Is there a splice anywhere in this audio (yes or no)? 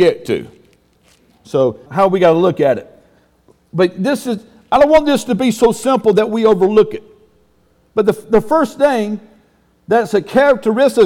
yes